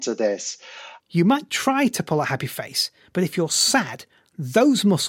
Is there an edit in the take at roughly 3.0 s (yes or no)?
no